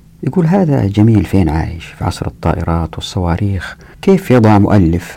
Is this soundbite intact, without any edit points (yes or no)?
no